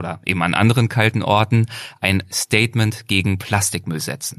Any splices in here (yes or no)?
no